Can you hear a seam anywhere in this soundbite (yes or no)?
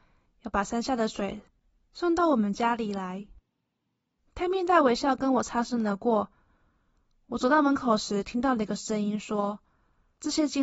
no